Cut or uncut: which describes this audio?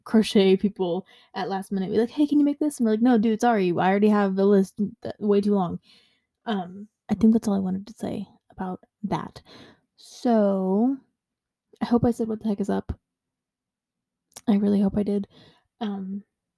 cut